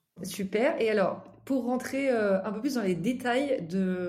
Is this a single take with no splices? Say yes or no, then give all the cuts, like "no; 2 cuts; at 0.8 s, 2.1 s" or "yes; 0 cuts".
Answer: yes; 0 cuts